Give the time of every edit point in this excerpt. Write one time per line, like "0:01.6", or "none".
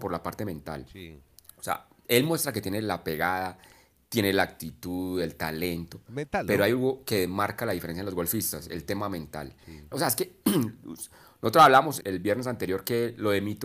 0:09.9
0:12.0